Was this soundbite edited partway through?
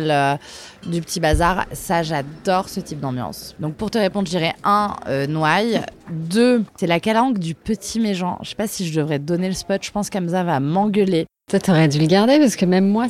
yes; 1 cut; at 6.7 s

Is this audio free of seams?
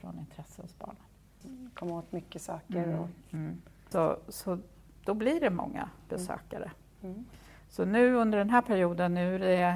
no; 2 cuts; at 1.4 s, 3.9 s

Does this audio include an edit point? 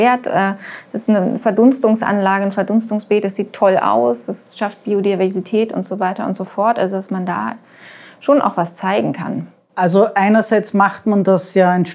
no; 0 cuts

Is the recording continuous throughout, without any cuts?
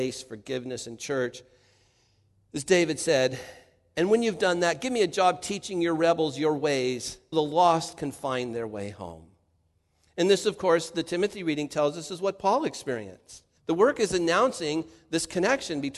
no; 2 cuts; at 7.3 s, 13.6 s

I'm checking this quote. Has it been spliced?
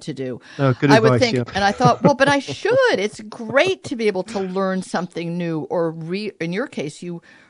yes; 1 cut; at 1.5 s

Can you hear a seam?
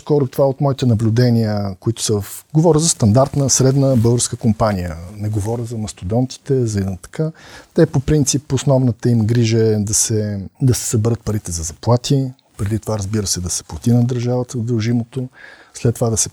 yes; 1 cut; at 10.5 s

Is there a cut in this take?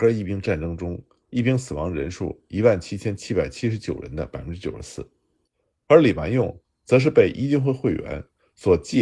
yes; 1 cut; at 5.8 s

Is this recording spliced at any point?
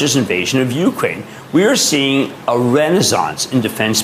no; 0 cuts

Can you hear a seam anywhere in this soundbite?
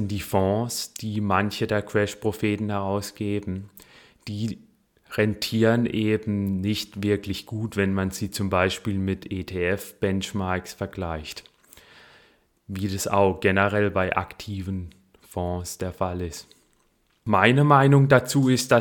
no; 0 cuts

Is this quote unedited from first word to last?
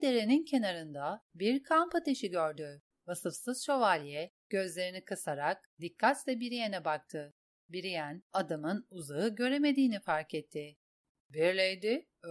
no; 1 cut; at 2.9 s

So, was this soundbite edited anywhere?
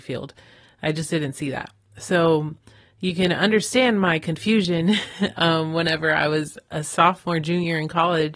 no; 0 cuts

